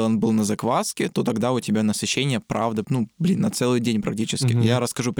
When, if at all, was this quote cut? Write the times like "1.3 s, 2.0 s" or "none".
2.8 s